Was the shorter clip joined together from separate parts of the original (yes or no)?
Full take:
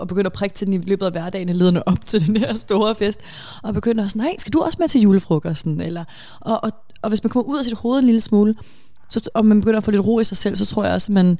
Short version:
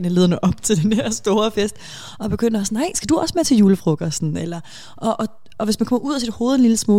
no